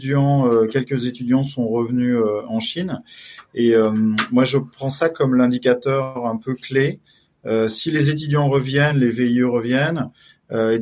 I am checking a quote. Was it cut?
yes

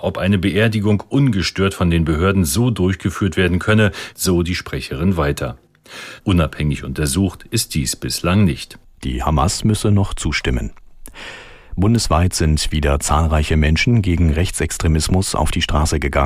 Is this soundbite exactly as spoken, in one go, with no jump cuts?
no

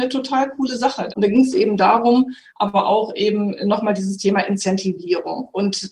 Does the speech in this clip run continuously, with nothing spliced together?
no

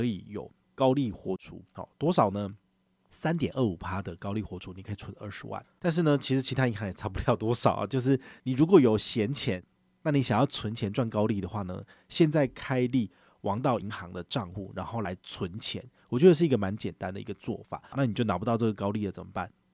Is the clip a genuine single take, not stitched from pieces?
no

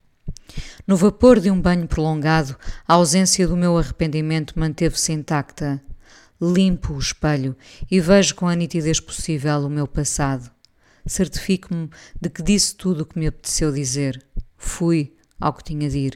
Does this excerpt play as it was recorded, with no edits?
yes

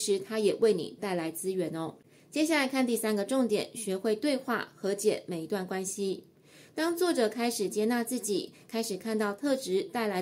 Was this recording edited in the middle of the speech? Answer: no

